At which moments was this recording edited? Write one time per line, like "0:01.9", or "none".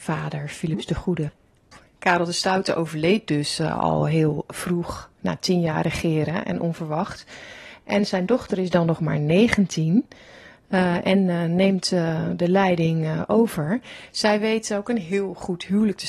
none